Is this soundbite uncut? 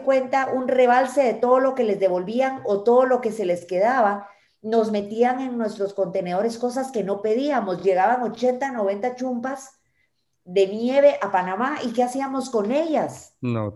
yes; 0 cuts

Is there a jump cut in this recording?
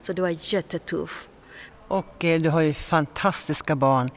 yes; 1 cut; at 1.7 s

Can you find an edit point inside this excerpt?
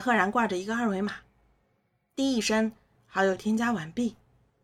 no; 0 cuts

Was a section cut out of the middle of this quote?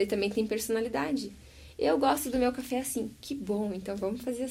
no; 0 cuts

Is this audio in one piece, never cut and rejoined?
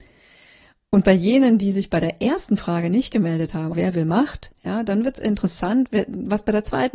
no; 1 cut; at 3.7 s

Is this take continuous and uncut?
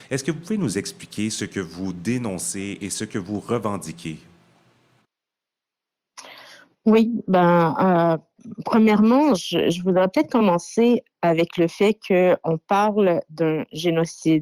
yes; 0 cuts

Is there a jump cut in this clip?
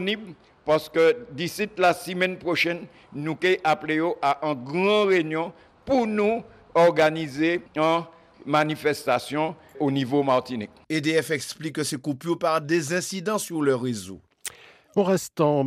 no; 0 cuts

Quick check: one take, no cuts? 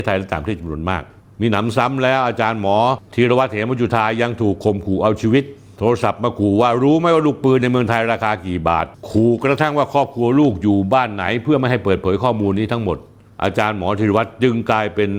yes; 0 cuts

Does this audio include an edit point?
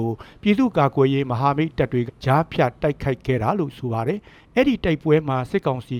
yes; 1 cut; at 2.1 s

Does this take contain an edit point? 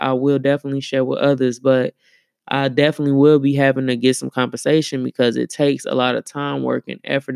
no; 0 cuts

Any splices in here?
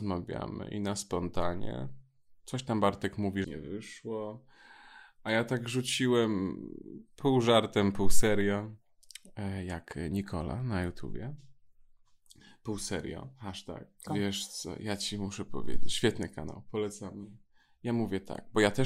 yes; 2 cuts; at 3.4 s, 14.1 s

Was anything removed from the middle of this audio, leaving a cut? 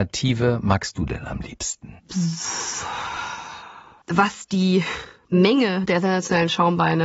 yes; 2 cuts; at 2.0 s, 4.0 s

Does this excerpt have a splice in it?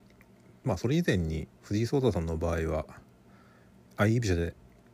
yes; 1 cut; at 1.6 s

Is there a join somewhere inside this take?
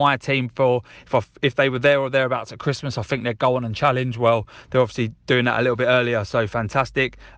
no; 0 cuts

